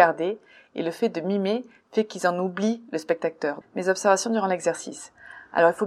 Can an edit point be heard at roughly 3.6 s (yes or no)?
yes